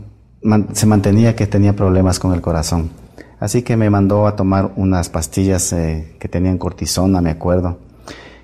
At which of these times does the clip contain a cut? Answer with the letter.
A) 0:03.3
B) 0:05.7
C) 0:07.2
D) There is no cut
D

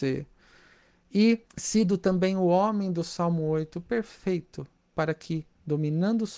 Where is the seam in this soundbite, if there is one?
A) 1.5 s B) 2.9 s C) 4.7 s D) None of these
A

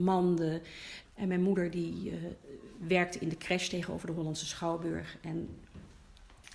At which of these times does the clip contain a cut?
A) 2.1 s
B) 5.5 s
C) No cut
C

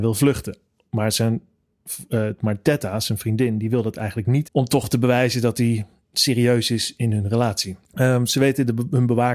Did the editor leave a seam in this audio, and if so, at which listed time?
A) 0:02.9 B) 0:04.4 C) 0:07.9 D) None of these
B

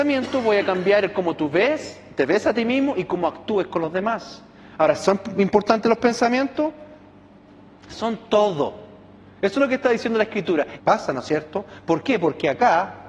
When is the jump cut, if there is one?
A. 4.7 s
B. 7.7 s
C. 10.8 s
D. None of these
C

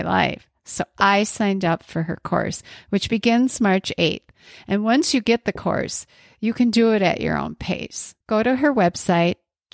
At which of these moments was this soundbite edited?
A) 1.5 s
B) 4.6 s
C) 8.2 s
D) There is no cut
C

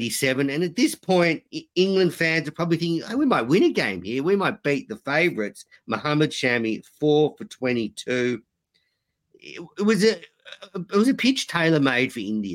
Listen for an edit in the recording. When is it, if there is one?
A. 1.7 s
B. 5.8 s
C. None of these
B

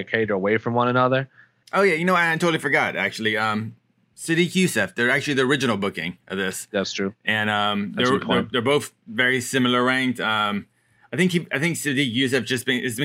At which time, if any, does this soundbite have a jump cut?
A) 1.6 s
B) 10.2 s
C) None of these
A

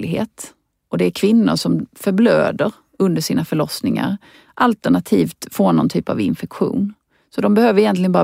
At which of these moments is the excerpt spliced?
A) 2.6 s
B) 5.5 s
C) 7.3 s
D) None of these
D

